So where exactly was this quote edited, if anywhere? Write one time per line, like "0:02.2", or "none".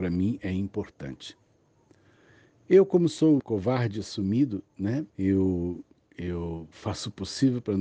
0:03.4
0:05.1